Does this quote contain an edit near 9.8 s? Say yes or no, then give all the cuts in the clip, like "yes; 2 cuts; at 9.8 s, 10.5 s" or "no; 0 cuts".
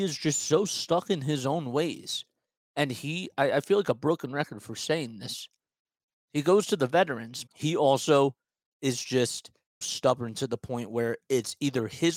yes; 2 cuts; at 7.5 s, 9.8 s